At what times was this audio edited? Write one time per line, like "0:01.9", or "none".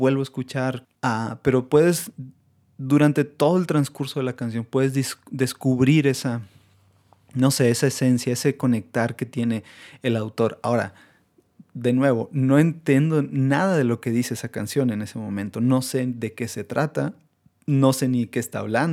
0:01.0